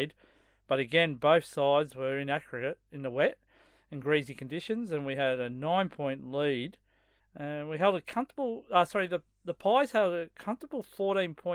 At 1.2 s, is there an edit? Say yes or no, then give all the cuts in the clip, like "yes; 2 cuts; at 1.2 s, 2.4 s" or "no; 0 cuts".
no; 1 cut; at 7.2 s